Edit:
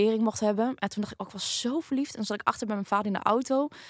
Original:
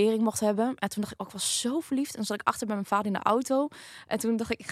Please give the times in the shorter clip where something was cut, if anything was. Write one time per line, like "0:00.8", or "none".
none